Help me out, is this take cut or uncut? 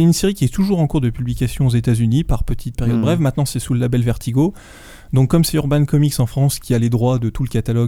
cut